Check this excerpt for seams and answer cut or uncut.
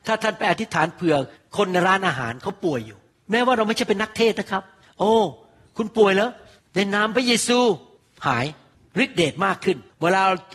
uncut